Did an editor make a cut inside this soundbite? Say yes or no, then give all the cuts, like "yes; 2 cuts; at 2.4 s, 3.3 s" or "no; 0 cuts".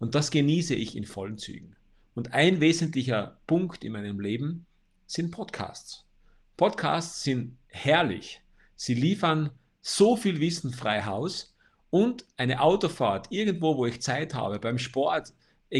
no; 0 cuts